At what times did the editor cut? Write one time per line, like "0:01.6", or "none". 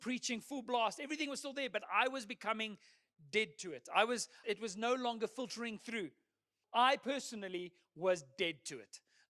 0:04.4
0:06.6